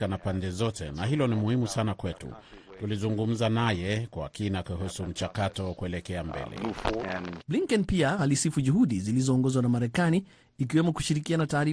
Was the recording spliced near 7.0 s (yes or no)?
yes